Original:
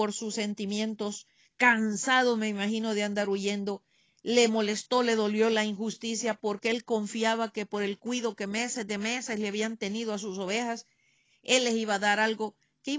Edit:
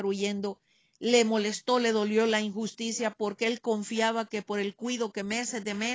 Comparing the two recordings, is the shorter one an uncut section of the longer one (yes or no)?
yes